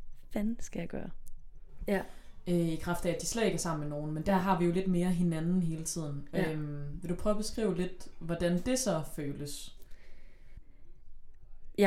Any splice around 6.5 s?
no; 1 cut; at 1.8 s

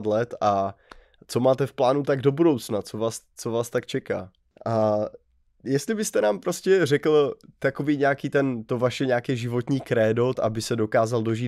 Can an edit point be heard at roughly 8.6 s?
no; 2 cuts; at 4.6 s, 10.3 s

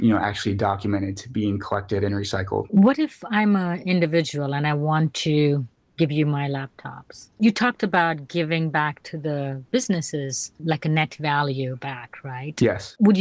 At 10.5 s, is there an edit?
no; 0 cuts

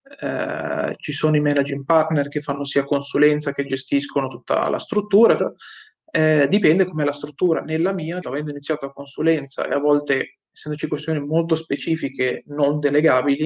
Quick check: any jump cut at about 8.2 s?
yes; 2 cuts; at 5.4 s, 8.2 s

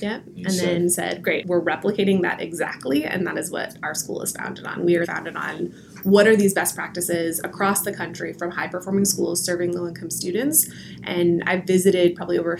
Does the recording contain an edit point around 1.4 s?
yes; 2 cuts; at 1.4 s, 5.0 s

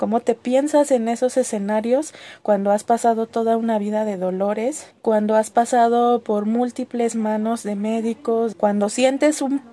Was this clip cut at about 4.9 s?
yes; 2 cuts; at 4.9 s, 8.5 s

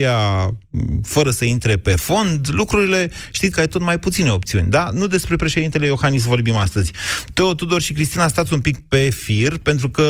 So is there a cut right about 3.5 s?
yes; 1 cut; at 3.5 s

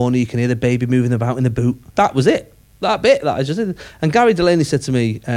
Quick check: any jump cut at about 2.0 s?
yes; 1 cut; at 2.0 s

